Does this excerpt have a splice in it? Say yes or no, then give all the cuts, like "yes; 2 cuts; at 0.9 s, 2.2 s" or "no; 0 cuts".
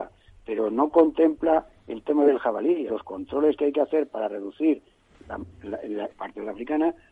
yes; 2 cuts; at 2.9 s, 6.1 s